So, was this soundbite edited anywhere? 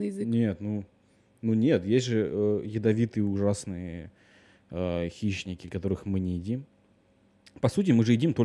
no; 0 cuts

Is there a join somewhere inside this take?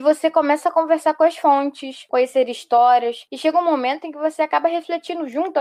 no; 0 cuts

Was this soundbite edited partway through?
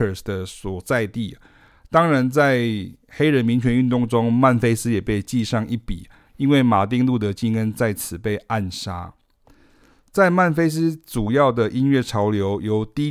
no; 0 cuts

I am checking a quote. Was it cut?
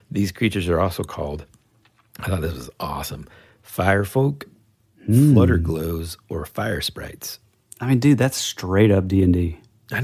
no; 0 cuts

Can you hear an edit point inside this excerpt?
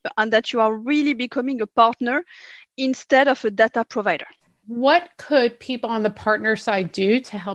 yes; 1 cut; at 4.6 s

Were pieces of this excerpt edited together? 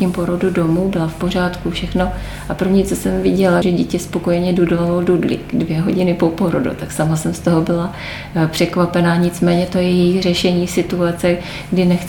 yes; 1 cut; at 3.6 s

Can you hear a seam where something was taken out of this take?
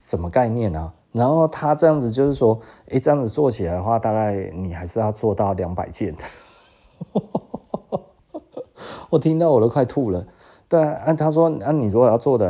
no; 0 cuts

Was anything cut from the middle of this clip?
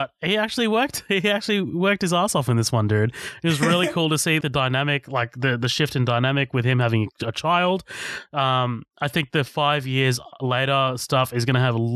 yes; 1 cut; at 4.4 s

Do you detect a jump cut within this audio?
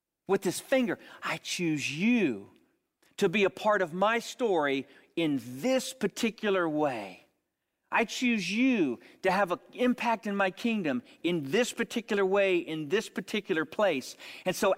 no; 0 cuts

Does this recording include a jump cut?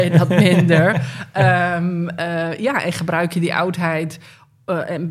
no; 0 cuts

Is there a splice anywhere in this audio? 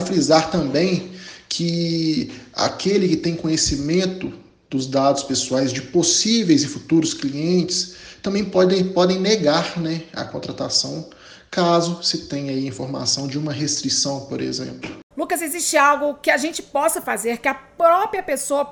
yes; 1 cut; at 15.1 s

